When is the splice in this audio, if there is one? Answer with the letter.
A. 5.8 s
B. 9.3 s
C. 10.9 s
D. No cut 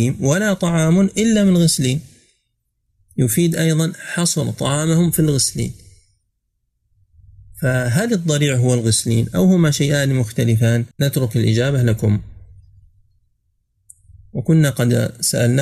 C